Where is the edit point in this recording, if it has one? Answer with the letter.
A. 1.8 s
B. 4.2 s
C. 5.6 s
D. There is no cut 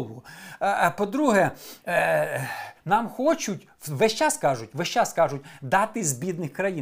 A